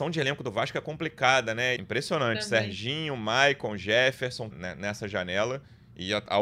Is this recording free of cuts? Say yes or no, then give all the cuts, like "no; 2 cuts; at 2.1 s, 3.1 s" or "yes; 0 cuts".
no; 2 cuts; at 1.8 s, 4.5 s